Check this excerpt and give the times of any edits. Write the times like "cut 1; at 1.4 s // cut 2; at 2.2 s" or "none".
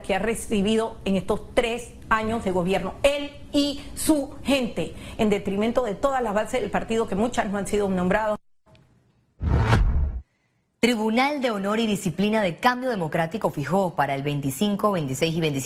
none